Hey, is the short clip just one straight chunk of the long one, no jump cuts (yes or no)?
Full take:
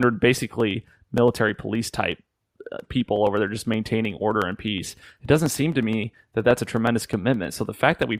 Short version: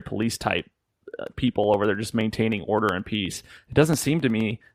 yes